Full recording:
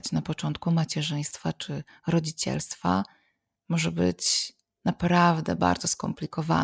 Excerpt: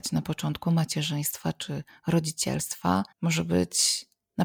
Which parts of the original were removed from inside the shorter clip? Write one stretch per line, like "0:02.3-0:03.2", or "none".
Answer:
0:03.1-0:03.6

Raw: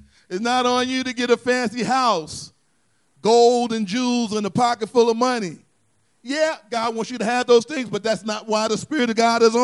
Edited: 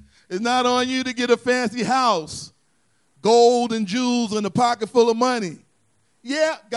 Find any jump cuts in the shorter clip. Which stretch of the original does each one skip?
none

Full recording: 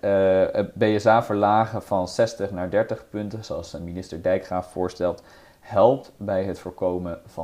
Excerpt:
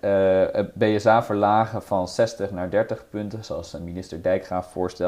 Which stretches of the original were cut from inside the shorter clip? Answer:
none

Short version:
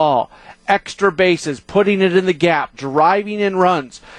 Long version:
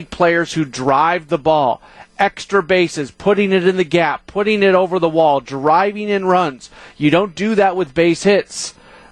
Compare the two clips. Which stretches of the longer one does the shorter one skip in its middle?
0:04.2-0:05.4

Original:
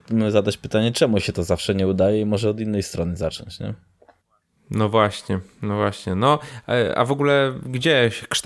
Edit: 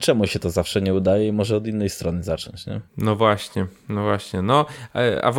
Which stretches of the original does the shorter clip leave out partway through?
0:03.8-0:04.6

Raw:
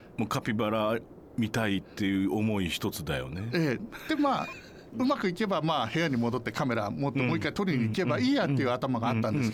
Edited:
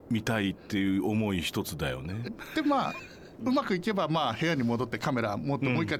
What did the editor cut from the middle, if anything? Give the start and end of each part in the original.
0:03.5-0:03.8

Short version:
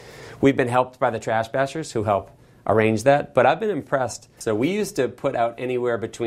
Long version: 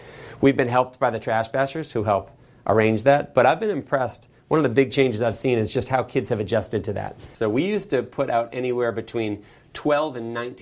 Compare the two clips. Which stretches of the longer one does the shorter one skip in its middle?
0:04.4-0:07.3

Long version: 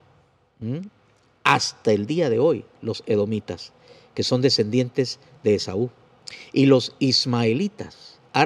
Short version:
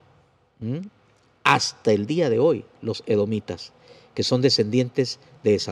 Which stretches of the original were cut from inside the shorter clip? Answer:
none

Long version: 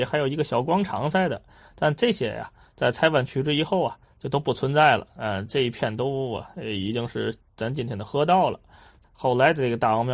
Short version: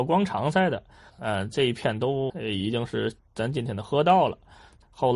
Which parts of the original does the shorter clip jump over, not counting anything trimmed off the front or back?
0:01.7-0:05.1
0:06.3-0:06.5

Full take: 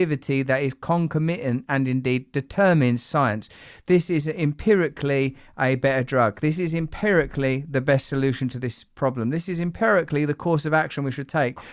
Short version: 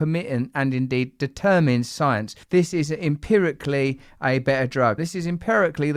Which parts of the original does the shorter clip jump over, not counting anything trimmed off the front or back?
0:03.6-0:03.8
0:06.3-0:09.3

